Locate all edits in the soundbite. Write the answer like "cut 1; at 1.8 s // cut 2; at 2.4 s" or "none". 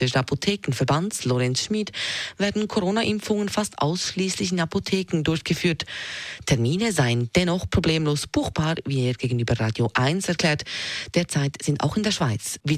none